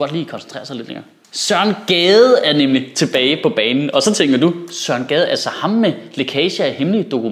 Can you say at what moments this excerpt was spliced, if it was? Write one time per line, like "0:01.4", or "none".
none